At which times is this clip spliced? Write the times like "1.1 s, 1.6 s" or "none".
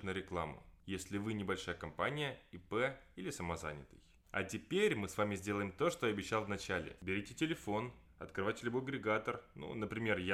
none

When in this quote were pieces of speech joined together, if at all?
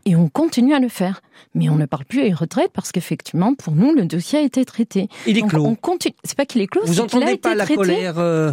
none

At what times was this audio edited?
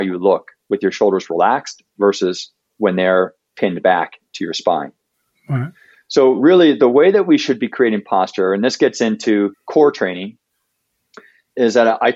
none

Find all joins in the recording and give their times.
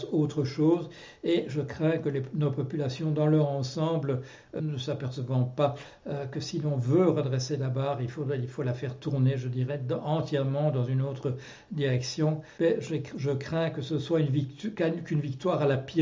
4.6 s, 12.6 s

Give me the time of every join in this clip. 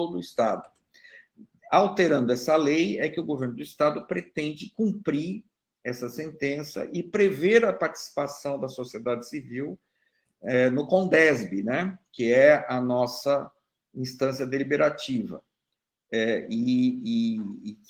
none

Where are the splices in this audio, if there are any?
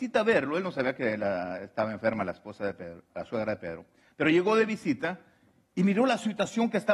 3.1 s

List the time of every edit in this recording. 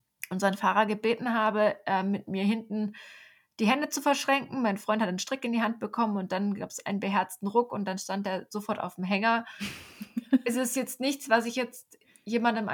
none

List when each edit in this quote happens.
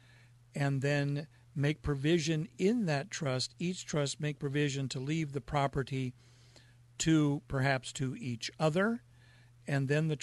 none

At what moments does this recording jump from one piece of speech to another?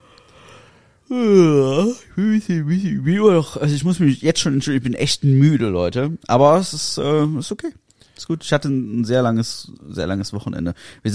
none

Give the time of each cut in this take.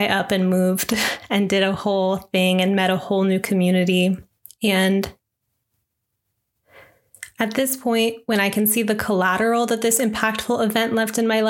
4.5 s

